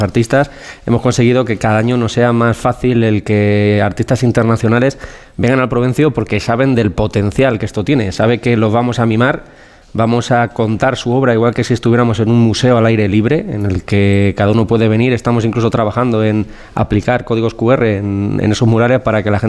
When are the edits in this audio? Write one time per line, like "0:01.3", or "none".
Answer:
none